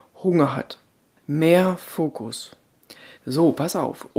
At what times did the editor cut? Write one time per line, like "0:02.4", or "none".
0:01.2
0:03.2